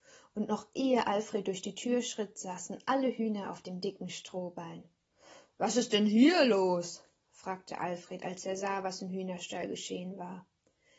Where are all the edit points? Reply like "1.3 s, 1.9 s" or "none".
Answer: none